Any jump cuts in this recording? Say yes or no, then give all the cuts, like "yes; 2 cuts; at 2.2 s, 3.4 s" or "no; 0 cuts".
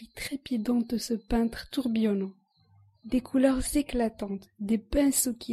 no; 0 cuts